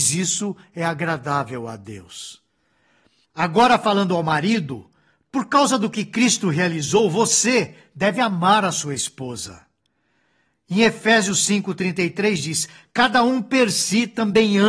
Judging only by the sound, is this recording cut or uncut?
uncut